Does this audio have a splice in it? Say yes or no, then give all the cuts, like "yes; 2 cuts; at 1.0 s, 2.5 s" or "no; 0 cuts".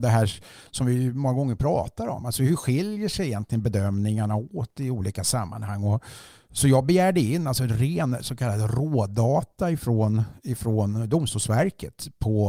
no; 0 cuts